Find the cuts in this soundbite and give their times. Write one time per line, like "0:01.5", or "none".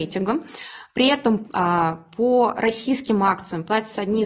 0:01.4